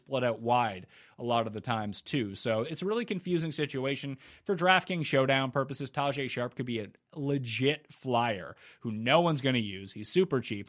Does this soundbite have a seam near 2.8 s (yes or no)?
no